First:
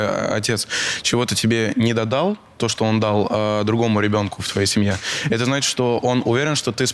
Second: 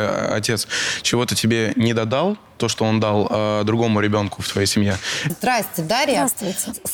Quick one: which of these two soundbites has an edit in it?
second; 1 cut; at 5.3 s

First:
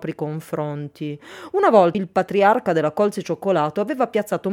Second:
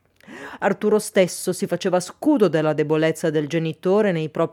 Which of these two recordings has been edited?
first; 1 cut; at 1.9 s

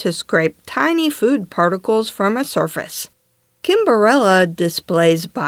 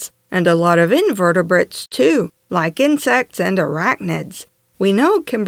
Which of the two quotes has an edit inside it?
second; 1 cut; at 4.6 s

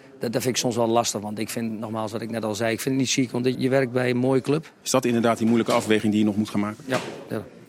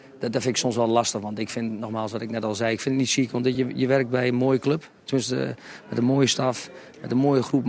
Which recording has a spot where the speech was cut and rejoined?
first; 2 cuts; at 3.5 s, 4.8 s

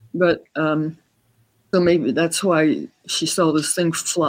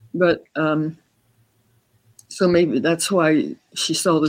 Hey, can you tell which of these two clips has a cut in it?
first; 1 cut; at 1.7 s

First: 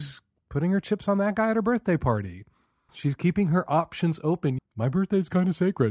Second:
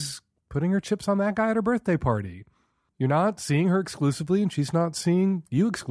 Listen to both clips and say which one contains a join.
first; 2 cuts; at 2.9 s, 4.6 s

